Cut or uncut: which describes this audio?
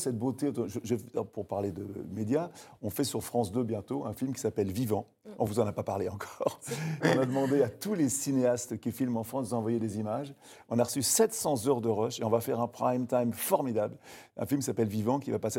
uncut